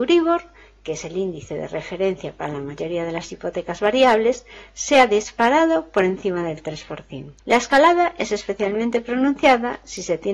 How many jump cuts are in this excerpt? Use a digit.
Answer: 1